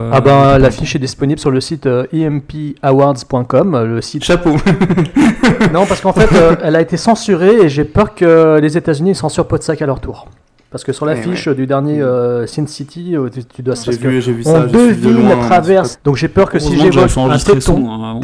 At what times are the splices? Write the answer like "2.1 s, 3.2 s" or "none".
4.2 s, 13.8 s, 15.9 s